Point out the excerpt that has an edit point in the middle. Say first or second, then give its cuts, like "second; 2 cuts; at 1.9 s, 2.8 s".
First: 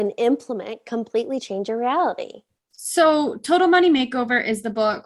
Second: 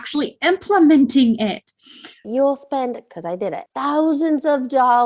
second; 2 cuts; at 2.2 s, 3.7 s